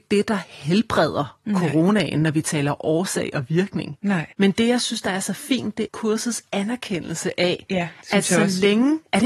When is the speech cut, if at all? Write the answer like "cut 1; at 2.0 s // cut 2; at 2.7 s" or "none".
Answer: cut 1; at 4.3 s // cut 2; at 5.9 s